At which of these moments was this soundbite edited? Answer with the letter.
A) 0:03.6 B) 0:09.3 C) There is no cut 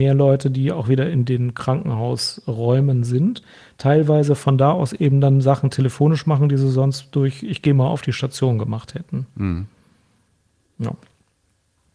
C